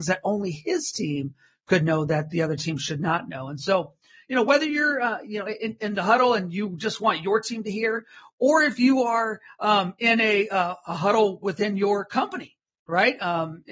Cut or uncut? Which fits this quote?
uncut